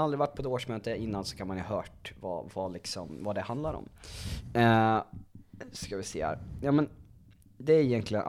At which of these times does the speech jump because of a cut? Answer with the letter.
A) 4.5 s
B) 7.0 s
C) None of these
C